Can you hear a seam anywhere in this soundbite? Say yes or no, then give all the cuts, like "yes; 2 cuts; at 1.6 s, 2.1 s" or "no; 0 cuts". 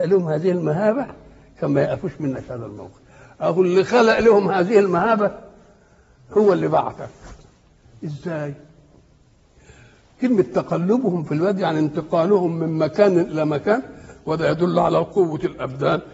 no; 0 cuts